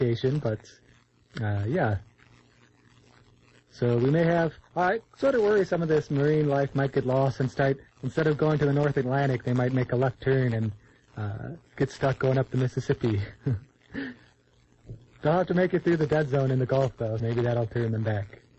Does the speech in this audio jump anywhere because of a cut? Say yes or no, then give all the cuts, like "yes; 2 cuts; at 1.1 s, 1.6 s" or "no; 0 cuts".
yes; 1 cut; at 17.2 s